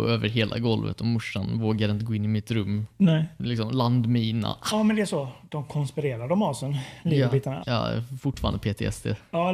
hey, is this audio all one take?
no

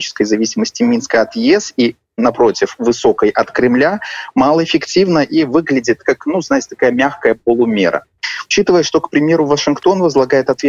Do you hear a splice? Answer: no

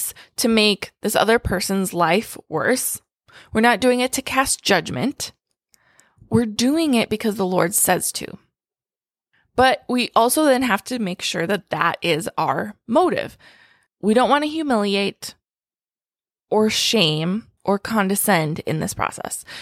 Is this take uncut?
no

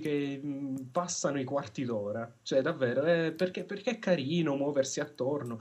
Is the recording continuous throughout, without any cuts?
yes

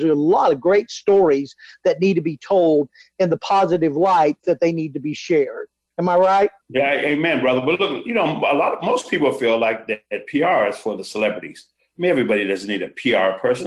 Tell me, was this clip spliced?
yes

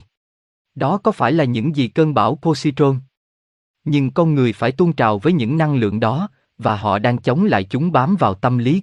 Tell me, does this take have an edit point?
yes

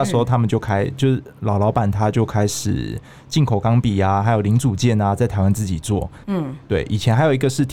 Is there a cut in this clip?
yes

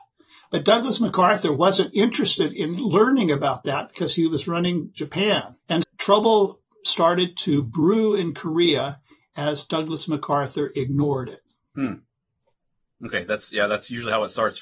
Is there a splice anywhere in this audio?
yes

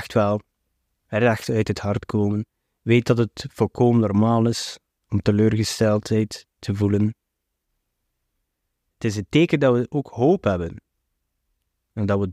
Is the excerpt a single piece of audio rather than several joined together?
yes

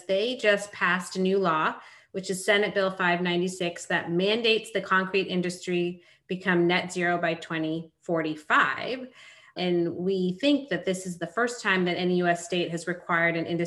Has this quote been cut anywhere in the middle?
no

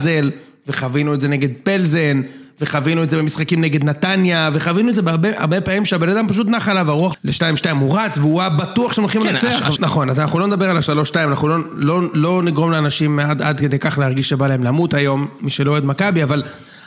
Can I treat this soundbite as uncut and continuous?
no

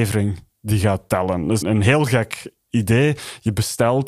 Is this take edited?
yes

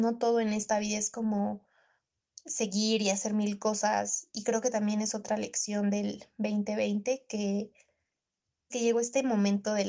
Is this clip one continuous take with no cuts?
no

